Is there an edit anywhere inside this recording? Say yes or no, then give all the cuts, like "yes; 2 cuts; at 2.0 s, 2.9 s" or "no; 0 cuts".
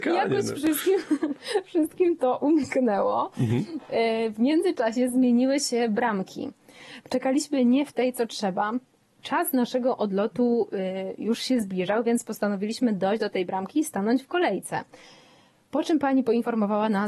no; 0 cuts